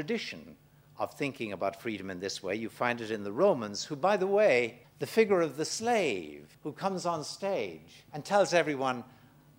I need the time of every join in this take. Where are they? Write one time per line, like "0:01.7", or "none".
0:04.8
0:06.5
0:08.1